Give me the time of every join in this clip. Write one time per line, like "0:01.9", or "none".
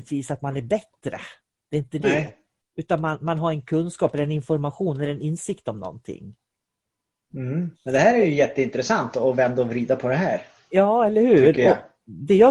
0:07.7

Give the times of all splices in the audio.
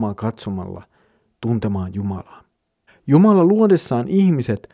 0:02.9

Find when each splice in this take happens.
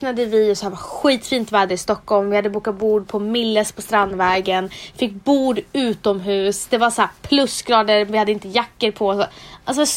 none

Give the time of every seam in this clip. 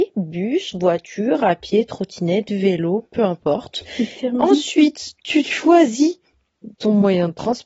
none

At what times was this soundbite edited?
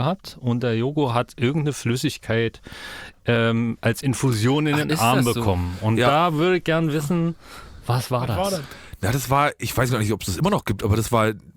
none

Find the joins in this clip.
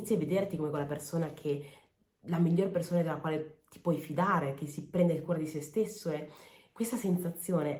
none

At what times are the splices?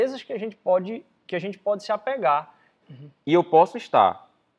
0:02.8

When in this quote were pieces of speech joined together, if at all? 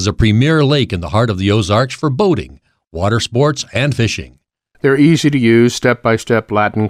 0:04.7

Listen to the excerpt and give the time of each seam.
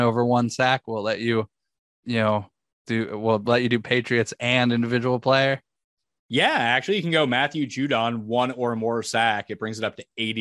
none

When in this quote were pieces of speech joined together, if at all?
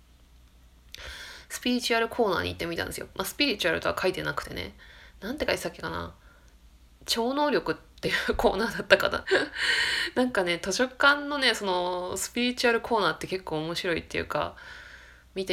0:09.2

